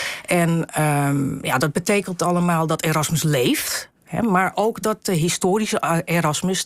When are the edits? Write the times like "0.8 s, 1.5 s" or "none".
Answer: 4.0 s